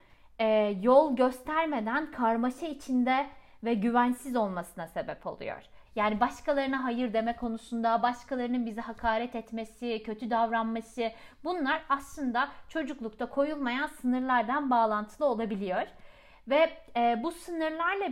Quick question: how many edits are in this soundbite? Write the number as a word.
one